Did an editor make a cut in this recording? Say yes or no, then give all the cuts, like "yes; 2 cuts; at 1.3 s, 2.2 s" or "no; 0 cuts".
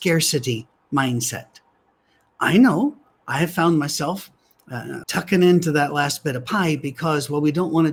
yes; 1 cut; at 5.0 s